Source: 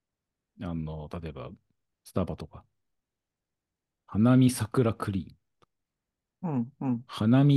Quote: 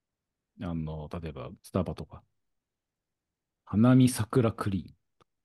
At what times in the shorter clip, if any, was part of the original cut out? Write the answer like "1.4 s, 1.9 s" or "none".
1.6 s